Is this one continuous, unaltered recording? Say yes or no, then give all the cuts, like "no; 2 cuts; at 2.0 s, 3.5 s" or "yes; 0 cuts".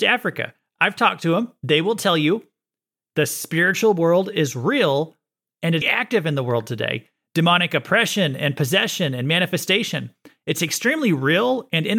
no; 1 cut; at 5.8 s